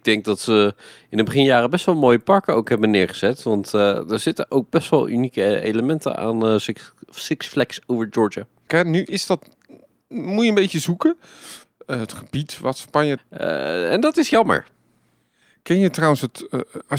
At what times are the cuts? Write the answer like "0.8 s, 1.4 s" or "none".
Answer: 8.7 s, 11.6 s, 13.2 s